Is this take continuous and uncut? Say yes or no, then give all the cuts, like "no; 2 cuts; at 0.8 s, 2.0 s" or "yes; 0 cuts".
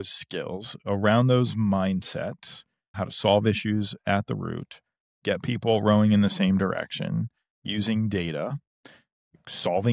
no; 1 cut; at 2.9 s